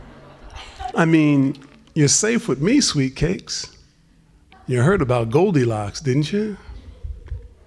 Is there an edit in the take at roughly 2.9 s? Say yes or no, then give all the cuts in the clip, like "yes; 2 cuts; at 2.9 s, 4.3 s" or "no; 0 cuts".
no; 2 cuts; at 0.9 s, 4.5 s